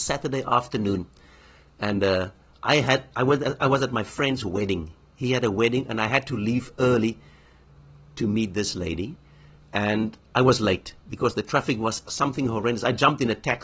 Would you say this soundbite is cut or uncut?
uncut